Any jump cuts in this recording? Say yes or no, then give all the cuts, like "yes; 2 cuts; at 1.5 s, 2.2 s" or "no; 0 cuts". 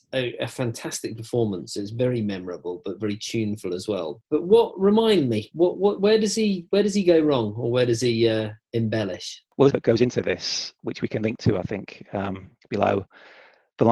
yes; 1 cut; at 9.7 s